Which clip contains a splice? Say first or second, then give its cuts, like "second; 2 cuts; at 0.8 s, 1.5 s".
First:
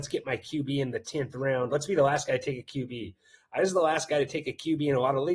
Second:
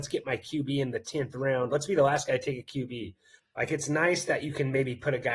second; 1 cut; at 3.4 s